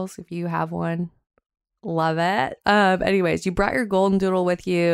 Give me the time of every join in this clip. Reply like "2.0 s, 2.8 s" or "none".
2.6 s